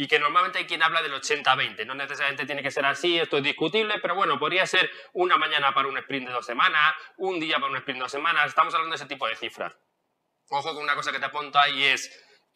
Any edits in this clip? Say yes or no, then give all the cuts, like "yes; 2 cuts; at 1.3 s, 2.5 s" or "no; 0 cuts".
no; 0 cuts